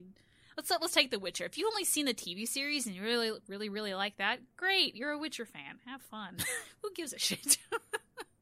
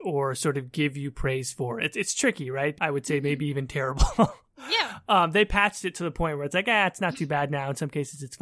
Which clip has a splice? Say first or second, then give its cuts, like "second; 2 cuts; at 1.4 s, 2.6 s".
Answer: second; 1 cut; at 2.8 s